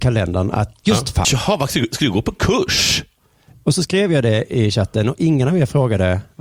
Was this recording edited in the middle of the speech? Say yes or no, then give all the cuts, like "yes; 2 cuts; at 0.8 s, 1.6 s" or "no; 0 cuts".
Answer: yes; 1 cut; at 1.2 s